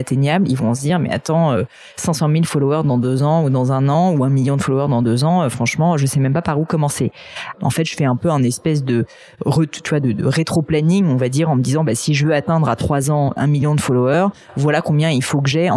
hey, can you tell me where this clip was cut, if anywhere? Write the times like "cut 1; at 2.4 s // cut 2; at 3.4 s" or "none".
cut 1; at 7.5 s // cut 2; at 13.4 s